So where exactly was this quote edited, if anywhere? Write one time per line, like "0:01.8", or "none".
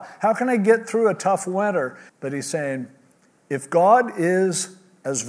0:02.1